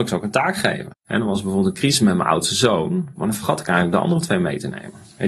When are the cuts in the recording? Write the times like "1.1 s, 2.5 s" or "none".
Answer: 0.9 s, 3.2 s